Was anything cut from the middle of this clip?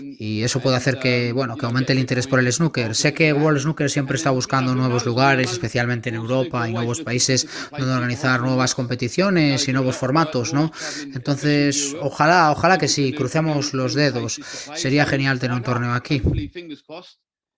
no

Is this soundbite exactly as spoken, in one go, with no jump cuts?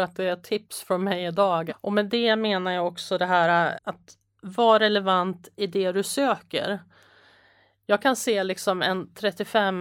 no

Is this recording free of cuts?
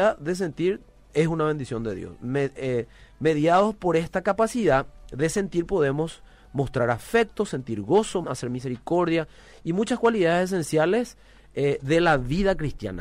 no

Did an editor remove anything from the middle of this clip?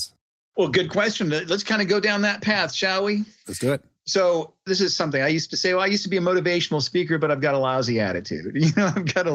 no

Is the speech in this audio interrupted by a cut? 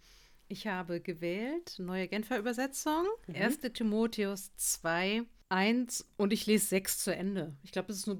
no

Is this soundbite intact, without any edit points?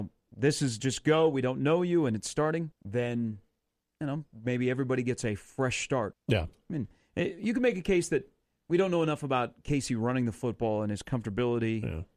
no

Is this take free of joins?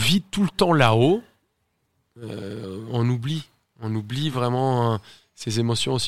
yes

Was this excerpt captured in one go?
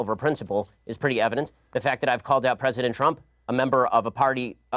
yes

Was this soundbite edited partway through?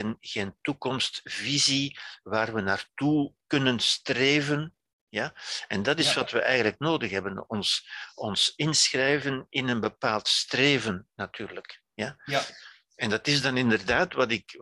no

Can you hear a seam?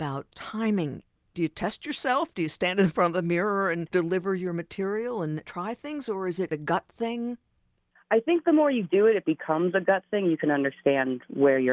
no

